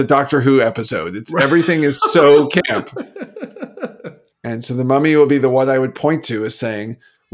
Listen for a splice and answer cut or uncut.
cut